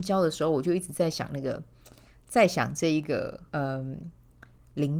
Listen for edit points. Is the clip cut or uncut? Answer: cut